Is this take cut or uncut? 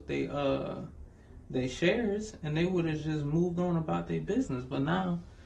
uncut